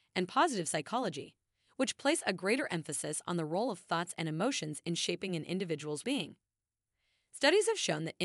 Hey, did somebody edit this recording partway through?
yes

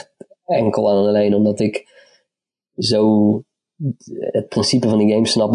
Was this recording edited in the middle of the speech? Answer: no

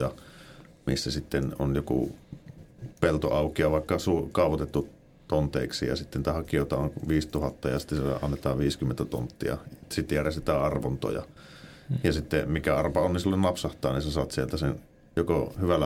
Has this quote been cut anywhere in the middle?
no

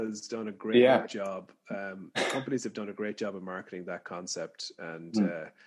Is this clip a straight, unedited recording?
yes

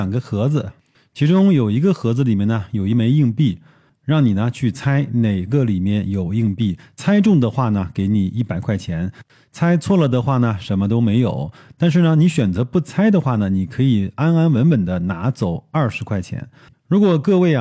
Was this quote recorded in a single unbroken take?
no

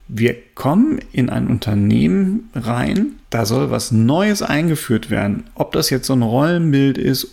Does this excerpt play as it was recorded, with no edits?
no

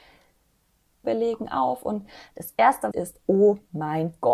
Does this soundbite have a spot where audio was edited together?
yes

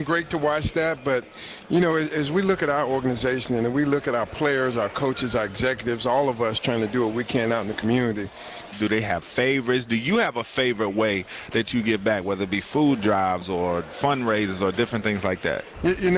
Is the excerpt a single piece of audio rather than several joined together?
no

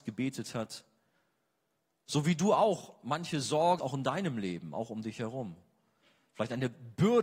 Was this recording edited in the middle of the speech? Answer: yes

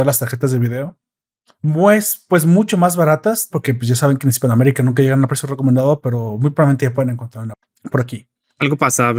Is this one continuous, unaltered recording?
no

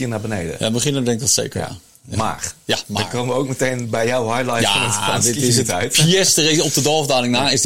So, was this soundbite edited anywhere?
no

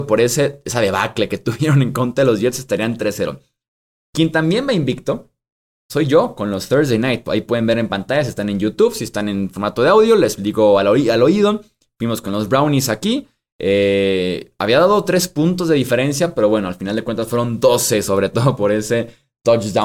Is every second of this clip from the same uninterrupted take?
yes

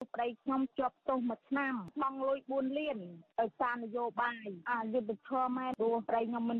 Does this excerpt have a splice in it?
no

